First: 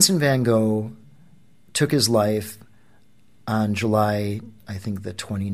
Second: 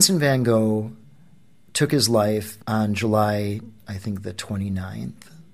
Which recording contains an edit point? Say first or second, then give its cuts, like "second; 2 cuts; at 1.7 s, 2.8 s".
second; 1 cut; at 2.6 s